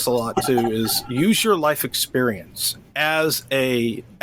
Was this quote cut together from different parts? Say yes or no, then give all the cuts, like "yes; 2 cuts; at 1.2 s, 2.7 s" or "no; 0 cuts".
no; 0 cuts